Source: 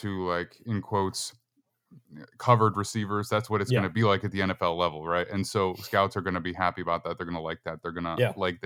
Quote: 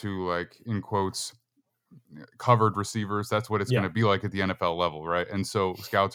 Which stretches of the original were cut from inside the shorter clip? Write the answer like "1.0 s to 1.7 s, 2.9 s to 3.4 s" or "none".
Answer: none